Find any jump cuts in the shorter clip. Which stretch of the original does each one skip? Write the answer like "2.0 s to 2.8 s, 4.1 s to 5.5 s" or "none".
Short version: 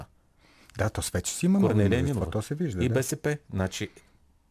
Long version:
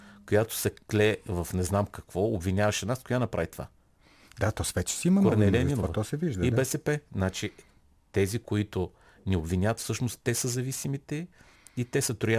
none